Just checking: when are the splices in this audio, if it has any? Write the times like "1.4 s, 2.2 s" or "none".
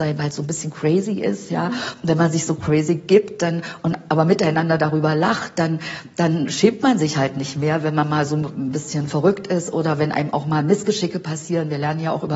none